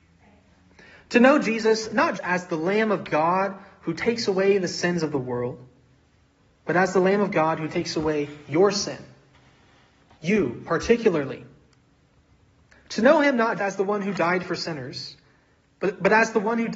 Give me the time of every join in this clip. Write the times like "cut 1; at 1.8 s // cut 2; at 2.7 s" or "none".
cut 1; at 2.2 s // cut 2; at 13.6 s